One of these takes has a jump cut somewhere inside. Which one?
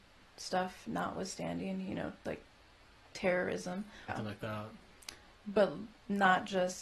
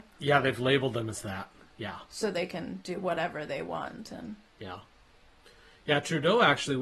first; 1 cut; at 4.1 s

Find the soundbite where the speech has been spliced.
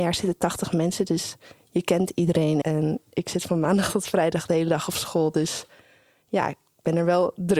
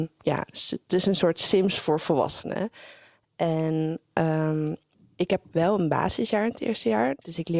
first; 1 cut; at 2.6 s

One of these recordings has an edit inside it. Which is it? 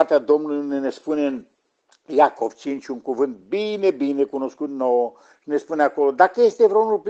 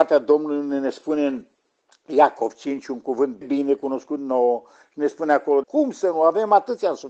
second; 2 cuts; at 3.4 s, 5.6 s

